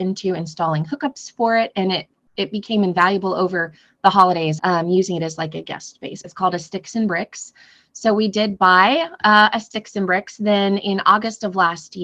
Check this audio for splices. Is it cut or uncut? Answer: cut